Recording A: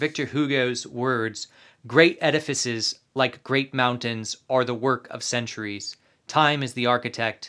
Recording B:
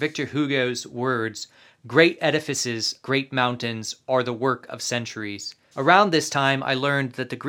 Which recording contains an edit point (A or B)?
B